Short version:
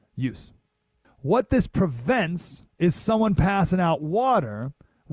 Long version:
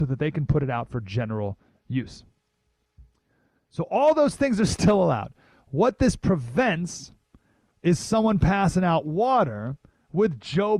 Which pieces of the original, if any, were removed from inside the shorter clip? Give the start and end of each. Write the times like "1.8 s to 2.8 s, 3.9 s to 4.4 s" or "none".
2.8 s to 5.5 s, 7.2 s to 7.7 s